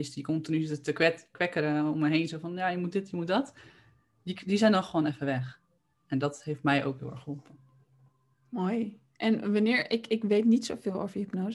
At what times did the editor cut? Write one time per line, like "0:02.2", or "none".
none